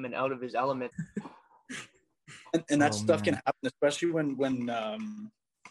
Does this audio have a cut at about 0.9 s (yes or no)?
yes